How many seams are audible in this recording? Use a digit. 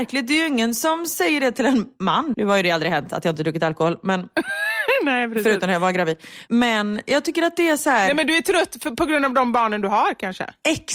1